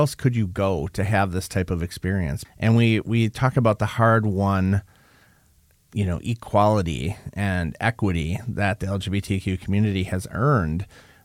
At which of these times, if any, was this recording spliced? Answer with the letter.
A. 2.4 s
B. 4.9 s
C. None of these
A